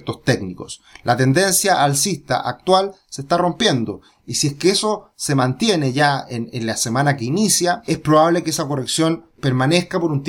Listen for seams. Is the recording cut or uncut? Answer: uncut